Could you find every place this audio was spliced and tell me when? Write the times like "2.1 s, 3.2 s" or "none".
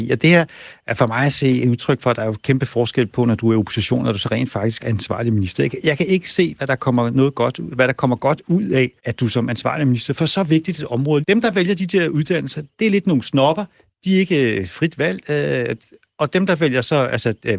4.8 s, 9.0 s, 11.2 s